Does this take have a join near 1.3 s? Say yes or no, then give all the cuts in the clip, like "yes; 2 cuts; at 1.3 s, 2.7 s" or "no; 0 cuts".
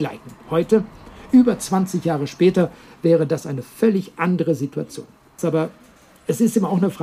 no; 1 cut; at 5.4 s